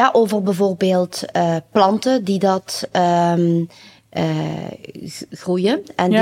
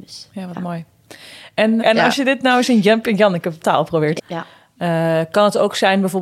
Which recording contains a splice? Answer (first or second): second